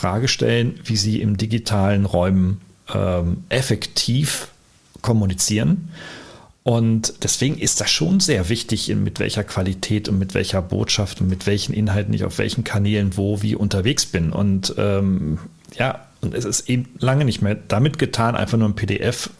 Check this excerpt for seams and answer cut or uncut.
cut